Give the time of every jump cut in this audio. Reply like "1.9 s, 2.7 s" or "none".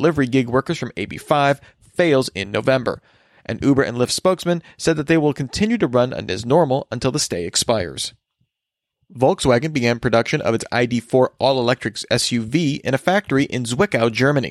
none